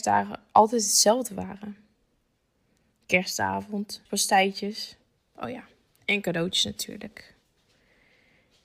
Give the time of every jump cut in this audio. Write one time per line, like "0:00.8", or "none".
0:04.1